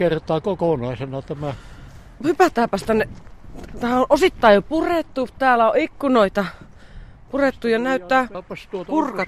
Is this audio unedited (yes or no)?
yes